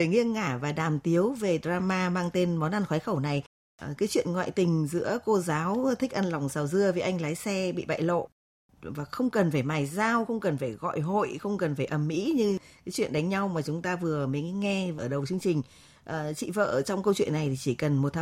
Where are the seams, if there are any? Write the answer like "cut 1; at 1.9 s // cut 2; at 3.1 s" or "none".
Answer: none